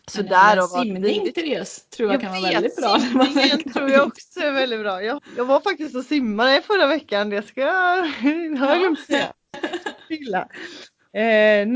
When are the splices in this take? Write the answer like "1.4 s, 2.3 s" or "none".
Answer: 5.2 s